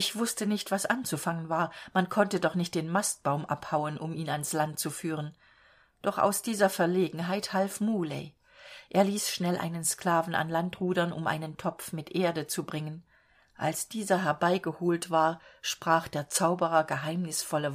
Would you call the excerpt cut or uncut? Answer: uncut